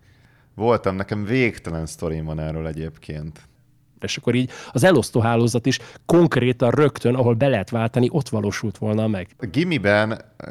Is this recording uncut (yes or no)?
no